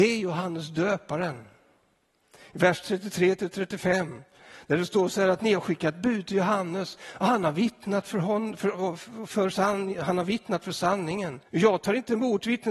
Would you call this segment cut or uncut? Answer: cut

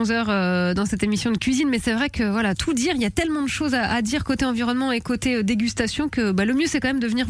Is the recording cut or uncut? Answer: uncut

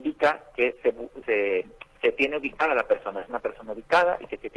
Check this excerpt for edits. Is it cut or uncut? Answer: cut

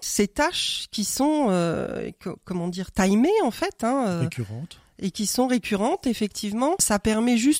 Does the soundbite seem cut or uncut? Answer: uncut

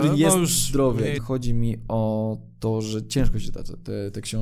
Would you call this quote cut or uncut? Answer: cut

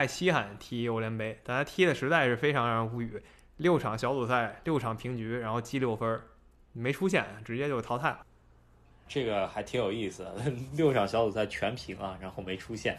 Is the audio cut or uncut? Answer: uncut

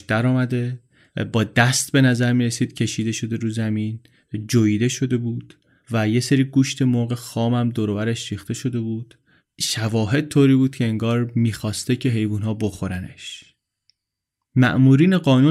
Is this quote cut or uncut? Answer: uncut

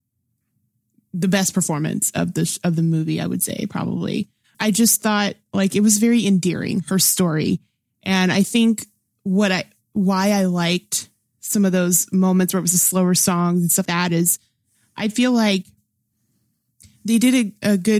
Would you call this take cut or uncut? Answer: cut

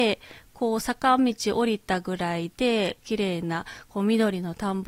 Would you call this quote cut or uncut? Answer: uncut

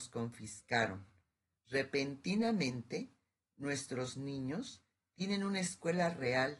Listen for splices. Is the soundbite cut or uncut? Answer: cut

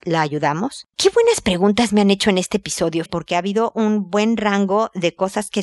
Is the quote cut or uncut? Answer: cut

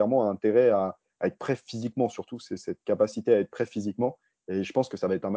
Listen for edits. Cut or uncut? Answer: uncut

